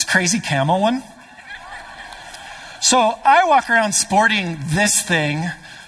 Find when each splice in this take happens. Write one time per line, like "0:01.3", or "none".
none